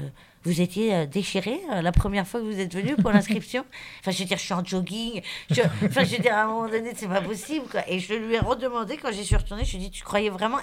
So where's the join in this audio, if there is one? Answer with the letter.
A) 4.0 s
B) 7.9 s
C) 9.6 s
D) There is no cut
A